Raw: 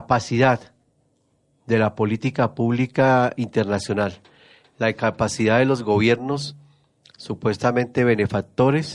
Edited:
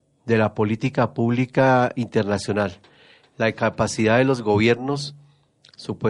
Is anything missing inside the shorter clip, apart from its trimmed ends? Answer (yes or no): no